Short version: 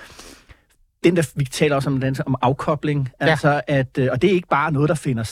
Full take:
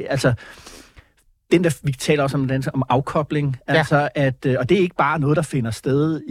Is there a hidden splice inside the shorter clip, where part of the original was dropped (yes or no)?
no